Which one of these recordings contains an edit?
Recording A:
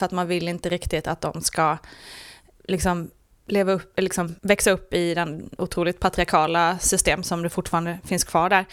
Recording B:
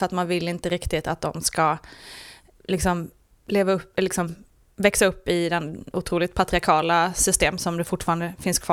A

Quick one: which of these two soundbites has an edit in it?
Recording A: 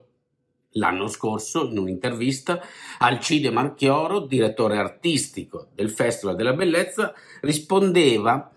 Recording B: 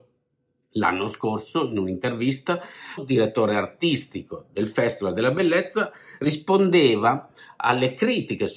B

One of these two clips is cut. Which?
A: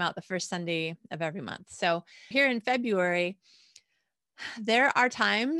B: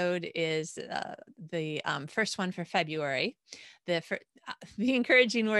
A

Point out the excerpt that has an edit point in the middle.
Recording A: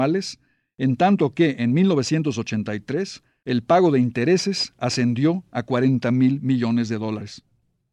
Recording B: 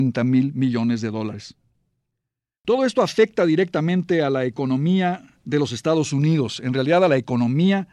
B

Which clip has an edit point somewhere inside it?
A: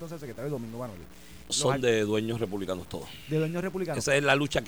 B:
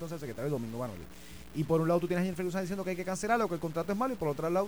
A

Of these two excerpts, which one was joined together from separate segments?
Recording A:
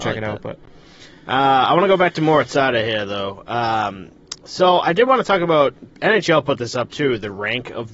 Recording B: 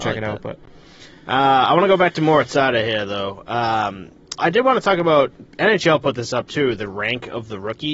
B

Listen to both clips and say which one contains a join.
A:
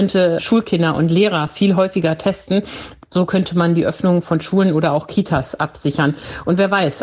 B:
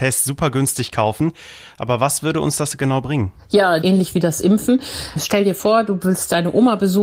B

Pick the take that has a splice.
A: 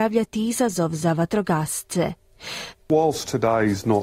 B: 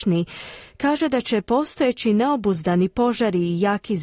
A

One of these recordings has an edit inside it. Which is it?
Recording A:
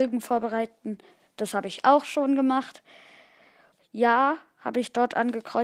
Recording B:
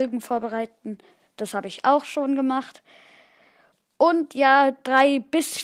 A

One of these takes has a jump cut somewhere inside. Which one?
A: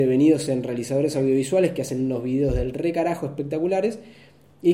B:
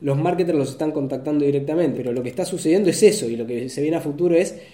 B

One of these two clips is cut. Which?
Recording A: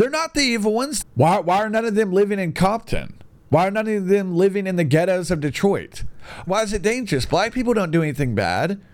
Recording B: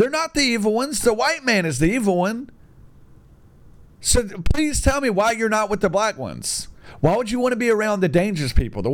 A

